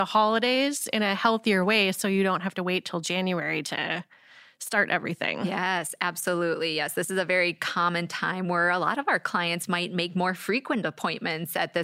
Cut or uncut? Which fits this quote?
uncut